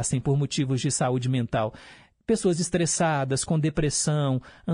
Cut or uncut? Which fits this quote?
uncut